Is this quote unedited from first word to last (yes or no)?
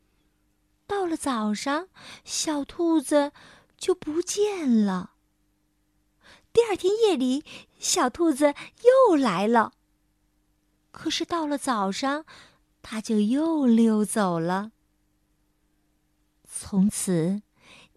yes